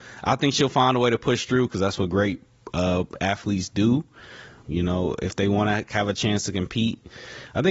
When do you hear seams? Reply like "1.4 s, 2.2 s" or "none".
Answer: 4.6 s

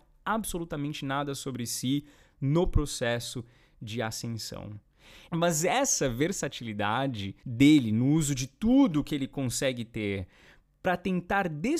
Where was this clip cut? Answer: 5.3 s, 7.4 s

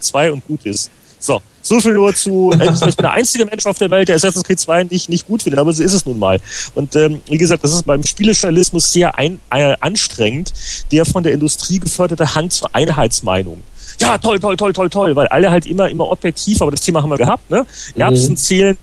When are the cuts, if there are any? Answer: 7.9 s, 17.2 s

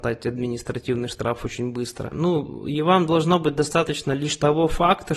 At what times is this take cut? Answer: 2.1 s

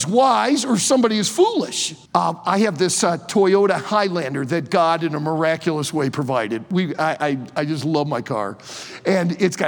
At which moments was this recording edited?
2.1 s

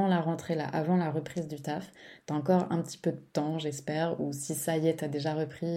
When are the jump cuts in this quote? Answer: none

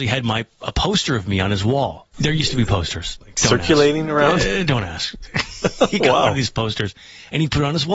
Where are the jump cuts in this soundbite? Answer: 2.1 s

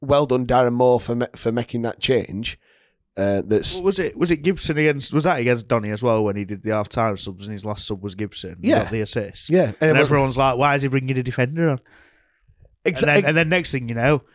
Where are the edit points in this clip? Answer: none

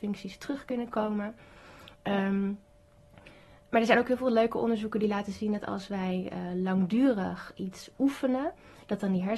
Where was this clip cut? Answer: none

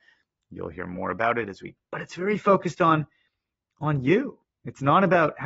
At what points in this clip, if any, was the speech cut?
1.8 s

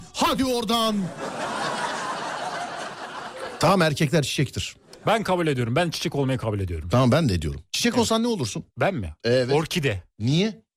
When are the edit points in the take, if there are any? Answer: 8.7 s

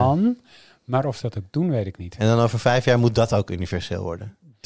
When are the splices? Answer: none

